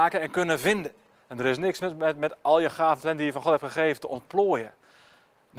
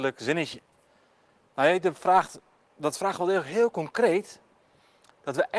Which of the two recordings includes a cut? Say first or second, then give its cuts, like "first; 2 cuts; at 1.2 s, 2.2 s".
first; 1 cut; at 1.2 s